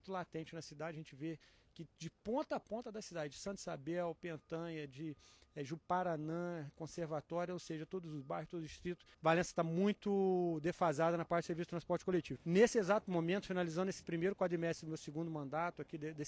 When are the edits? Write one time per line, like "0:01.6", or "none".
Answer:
0:09.1
0:12.4